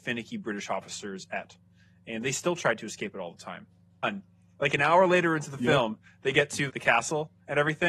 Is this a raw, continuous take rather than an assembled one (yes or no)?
no